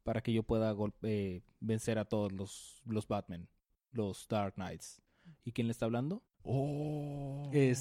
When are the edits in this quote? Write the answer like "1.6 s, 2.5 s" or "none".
6.3 s